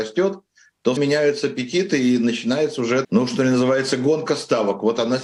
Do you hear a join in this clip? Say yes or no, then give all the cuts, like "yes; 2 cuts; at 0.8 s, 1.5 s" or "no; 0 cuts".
yes; 2 cuts; at 1.0 s, 3.0 s